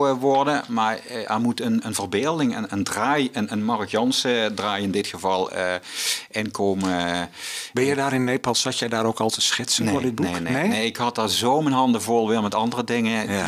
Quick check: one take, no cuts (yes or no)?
yes